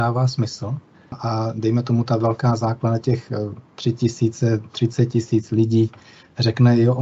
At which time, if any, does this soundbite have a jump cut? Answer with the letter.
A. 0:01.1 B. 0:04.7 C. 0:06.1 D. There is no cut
A